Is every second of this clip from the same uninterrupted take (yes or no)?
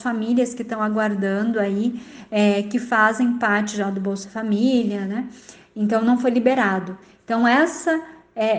yes